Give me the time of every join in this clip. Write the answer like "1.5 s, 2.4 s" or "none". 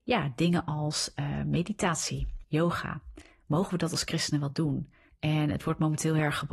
2.4 s, 5.1 s